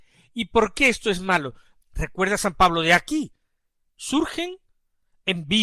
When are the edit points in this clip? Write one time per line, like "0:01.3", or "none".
0:01.8